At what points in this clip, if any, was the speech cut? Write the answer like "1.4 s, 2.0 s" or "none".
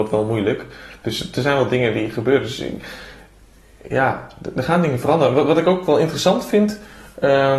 none